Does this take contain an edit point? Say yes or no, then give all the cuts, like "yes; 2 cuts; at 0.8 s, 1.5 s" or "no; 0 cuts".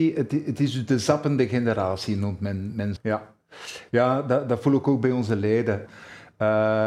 yes; 2 cuts; at 3.0 s, 5.9 s